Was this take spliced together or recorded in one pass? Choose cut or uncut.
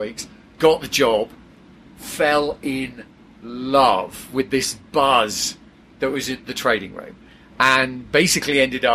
uncut